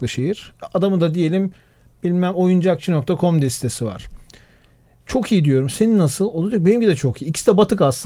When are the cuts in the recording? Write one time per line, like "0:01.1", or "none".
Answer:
none

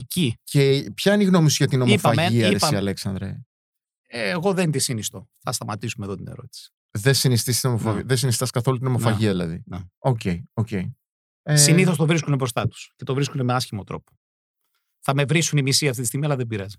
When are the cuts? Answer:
none

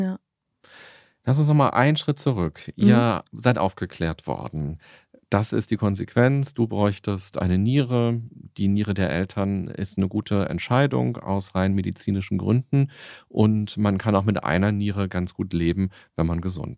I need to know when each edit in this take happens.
none

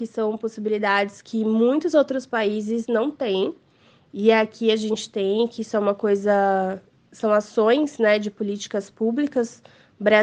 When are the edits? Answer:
none

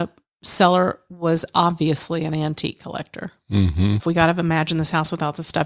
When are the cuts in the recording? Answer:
0:04.0

